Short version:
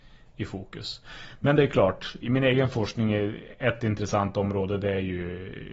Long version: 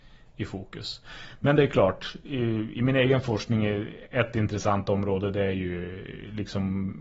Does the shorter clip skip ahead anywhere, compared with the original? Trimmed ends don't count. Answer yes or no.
yes